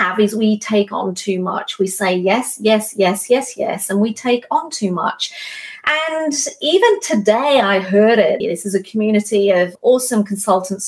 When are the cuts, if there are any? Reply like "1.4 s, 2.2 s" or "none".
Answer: 8.4 s